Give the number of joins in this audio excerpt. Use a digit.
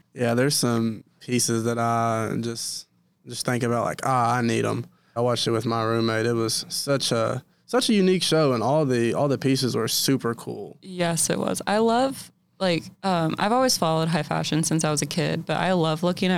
2